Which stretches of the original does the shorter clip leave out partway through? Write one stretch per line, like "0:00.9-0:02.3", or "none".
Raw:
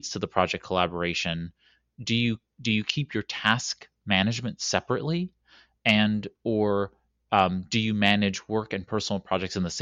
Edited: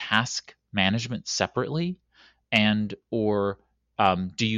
none